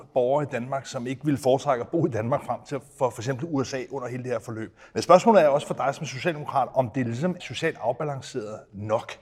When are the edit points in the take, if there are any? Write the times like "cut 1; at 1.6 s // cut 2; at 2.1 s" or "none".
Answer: cut 1; at 4.9 s // cut 2; at 7.4 s